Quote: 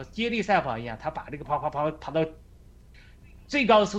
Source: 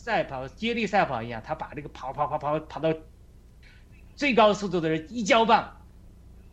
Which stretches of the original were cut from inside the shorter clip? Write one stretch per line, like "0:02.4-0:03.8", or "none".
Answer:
0:01.9-0:02.1